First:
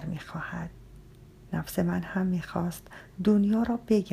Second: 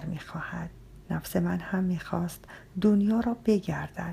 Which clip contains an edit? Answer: second; 1 cut; at 1.0 s

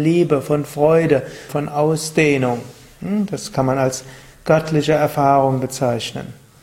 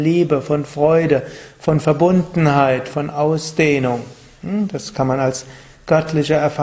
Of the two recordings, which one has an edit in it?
first; 1 cut; at 1.5 s

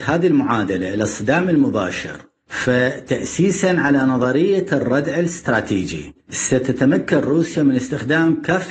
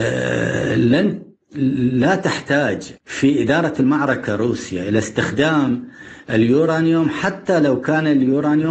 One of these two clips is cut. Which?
second; 1 cut; at 3.0 s

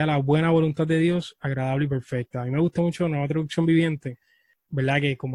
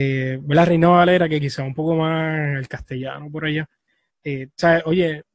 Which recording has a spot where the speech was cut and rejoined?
second; 1 cut; at 4.1 s

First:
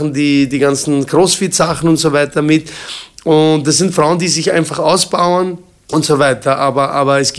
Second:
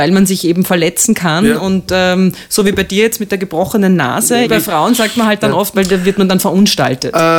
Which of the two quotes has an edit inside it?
second; 2 cuts; at 4.4 s, 5.7 s

